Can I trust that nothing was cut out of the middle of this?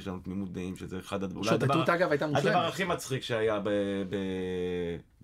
yes; 0 cuts

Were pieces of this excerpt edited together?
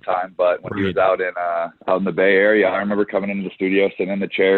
yes; 1 cut; at 1.8 s

